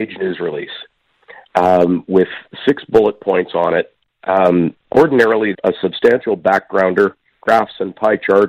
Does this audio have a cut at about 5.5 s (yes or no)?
yes